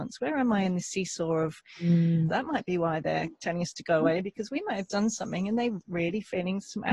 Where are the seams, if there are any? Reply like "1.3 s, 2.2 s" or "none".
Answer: 2.3 s